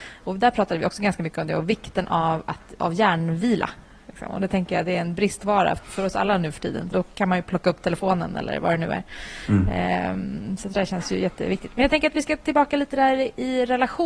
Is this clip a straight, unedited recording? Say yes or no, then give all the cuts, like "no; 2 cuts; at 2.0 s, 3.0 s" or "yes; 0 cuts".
no; 2 cuts; at 5.8 s, 6.9 s